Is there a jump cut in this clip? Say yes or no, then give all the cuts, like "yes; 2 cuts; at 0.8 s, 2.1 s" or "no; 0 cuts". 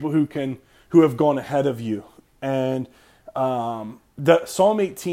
no; 0 cuts